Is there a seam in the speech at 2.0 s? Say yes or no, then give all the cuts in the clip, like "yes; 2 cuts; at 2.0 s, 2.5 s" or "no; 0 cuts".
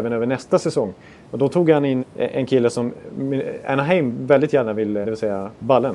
yes; 2 cuts; at 2.0 s, 5.0 s